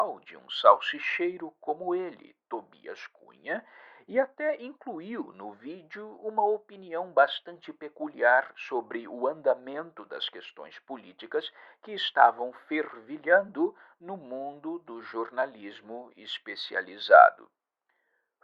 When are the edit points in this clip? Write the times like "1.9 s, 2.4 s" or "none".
none